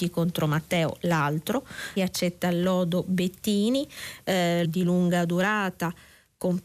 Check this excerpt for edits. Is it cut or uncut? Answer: cut